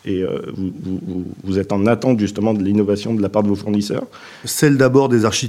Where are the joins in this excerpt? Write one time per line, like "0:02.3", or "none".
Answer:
0:04.4